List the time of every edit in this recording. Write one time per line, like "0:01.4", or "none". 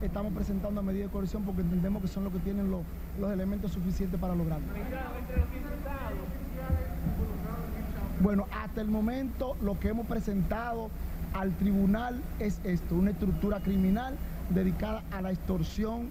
none